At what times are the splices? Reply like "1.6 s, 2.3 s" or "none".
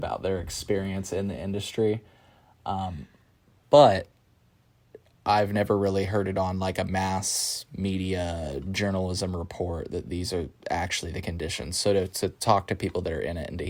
none

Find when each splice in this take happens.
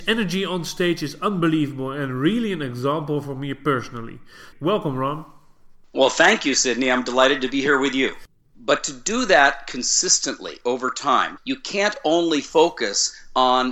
4.5 s, 8.5 s, 11.4 s

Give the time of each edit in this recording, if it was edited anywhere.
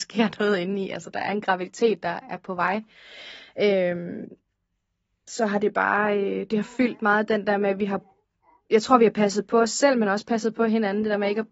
none

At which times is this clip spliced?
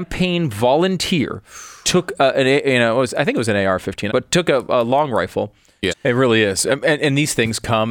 4.1 s, 5.9 s

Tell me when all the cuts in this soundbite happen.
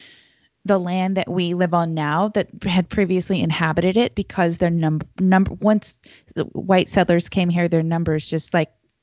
4.1 s

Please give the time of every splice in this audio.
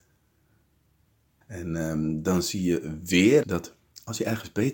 1.4 s, 3.4 s

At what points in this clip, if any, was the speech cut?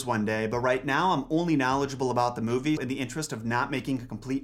2.8 s

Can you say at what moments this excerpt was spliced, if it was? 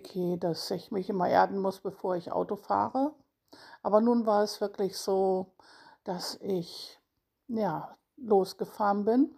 none

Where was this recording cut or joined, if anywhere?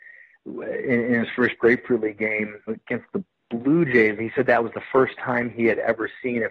2.7 s, 4.2 s

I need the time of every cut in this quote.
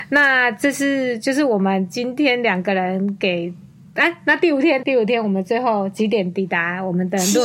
4.8 s

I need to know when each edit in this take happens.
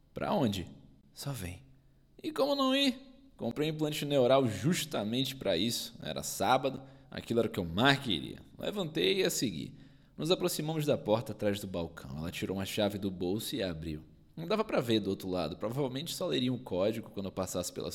7.1 s

